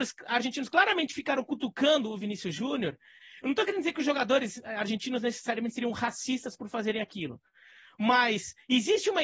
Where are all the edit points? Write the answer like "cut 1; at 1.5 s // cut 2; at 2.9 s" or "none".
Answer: none

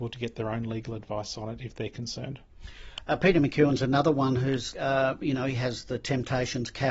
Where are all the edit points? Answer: cut 1; at 4.7 s

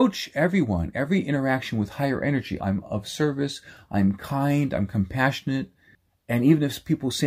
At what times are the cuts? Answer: cut 1; at 2.6 s

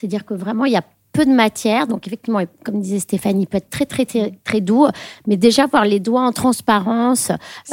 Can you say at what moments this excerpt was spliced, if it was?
none

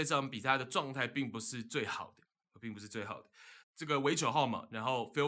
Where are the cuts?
cut 1; at 3.6 s

